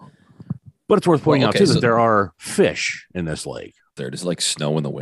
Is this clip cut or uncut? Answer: cut